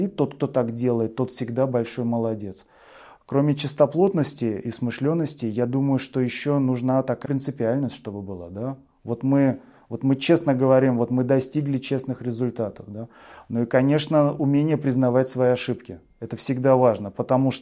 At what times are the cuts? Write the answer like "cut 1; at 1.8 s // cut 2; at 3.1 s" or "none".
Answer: cut 1; at 7.2 s